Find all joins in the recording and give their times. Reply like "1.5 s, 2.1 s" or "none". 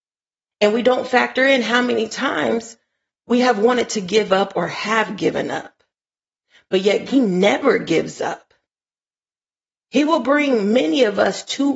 7.1 s